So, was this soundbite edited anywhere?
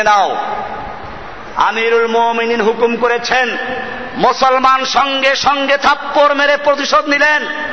no; 0 cuts

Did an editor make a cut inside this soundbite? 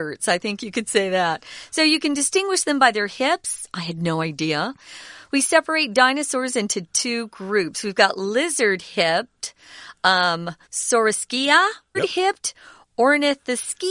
yes; 2 cuts; at 10.6 s, 11.9 s

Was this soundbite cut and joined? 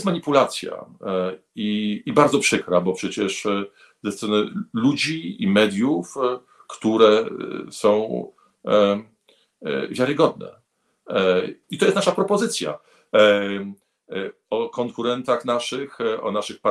yes; 2 cuts; at 6.6 s, 11.6 s

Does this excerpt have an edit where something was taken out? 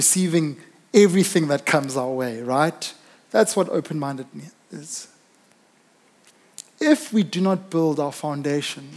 no; 0 cuts

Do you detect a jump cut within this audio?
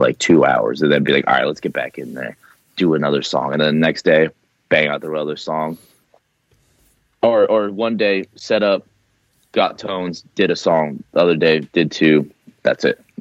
no; 0 cuts

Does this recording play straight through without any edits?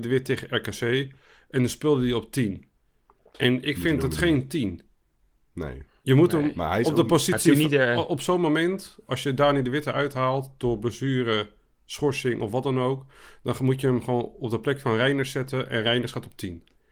yes; 0 cuts

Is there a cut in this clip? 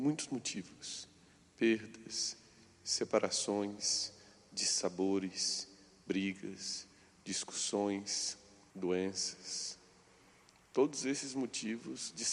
yes; 1 cut; at 8.7 s

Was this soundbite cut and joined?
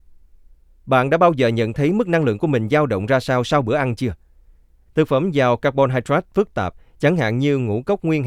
yes; 1 cut; at 4.9 s

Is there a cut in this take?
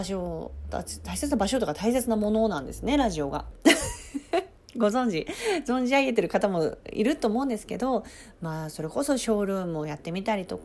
yes; 1 cut; at 3.5 s

